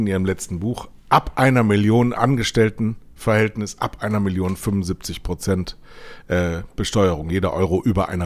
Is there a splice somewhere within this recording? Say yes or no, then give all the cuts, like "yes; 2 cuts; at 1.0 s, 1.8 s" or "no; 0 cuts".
no; 0 cuts